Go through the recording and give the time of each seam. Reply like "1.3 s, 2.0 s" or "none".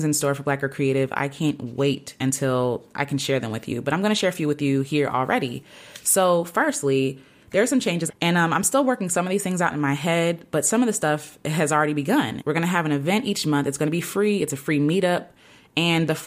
8.1 s, 12.4 s